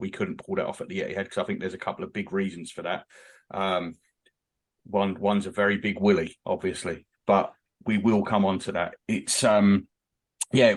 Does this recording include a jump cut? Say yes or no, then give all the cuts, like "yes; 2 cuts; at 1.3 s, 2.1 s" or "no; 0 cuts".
no; 0 cuts